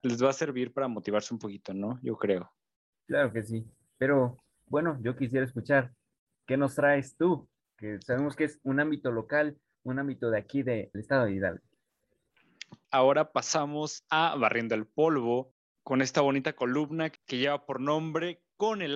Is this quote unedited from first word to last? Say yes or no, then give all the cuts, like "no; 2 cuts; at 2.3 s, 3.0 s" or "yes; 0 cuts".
no; 3 cuts; at 10.9 s, 12.8 s, 17.2 s